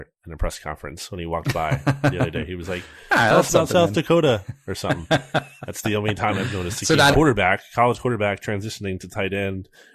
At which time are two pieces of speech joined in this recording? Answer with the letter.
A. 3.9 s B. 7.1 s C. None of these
B